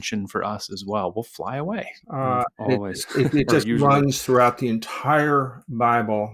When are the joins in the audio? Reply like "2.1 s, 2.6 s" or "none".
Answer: 2.0 s